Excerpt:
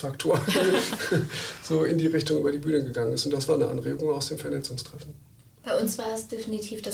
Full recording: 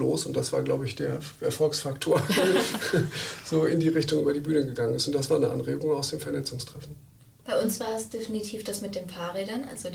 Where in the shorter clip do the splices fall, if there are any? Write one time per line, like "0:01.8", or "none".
none